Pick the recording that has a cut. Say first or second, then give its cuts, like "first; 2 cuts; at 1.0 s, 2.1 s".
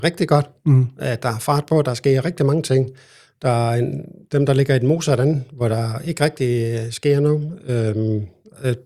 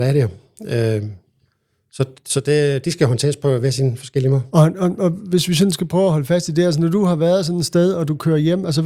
second; 1 cut; at 4.5 s